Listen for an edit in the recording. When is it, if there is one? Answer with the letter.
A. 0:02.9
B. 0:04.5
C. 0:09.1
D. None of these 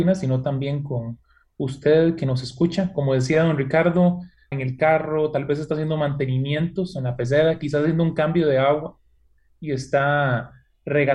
B